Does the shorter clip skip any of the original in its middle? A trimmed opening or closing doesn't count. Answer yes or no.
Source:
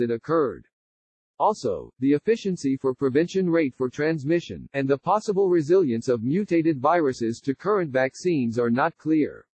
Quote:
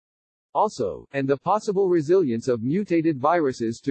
yes